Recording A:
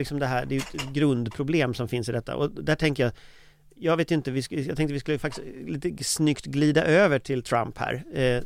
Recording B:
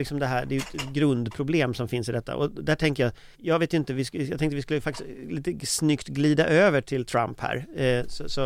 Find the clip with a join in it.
B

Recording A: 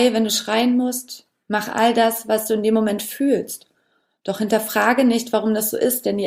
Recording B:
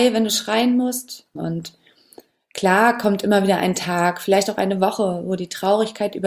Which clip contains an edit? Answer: B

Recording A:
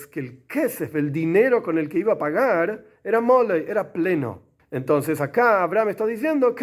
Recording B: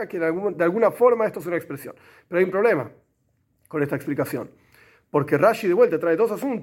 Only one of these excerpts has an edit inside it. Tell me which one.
A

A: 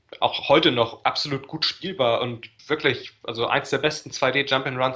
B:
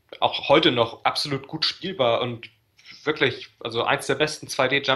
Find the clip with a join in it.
A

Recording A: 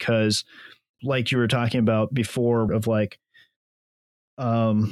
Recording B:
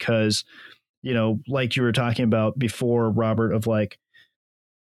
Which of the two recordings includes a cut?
A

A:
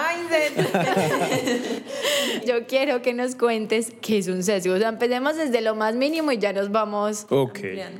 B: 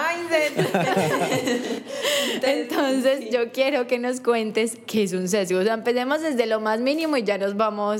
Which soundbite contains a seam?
A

